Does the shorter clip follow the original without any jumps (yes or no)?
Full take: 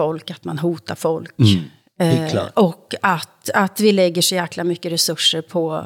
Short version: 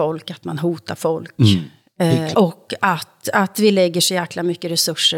no